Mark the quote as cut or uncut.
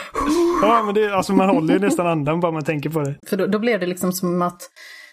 cut